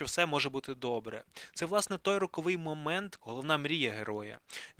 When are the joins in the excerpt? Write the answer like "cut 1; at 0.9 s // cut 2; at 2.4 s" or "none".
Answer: cut 1; at 3.2 s